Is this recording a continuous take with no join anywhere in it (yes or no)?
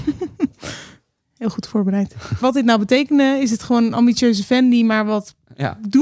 no